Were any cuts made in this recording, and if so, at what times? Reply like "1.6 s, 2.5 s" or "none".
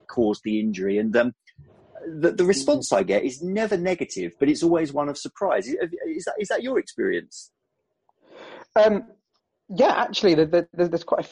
none